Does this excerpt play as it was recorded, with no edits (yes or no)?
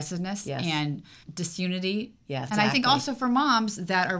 no